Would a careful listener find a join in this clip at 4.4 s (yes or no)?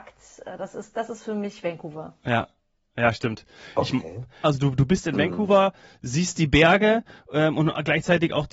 yes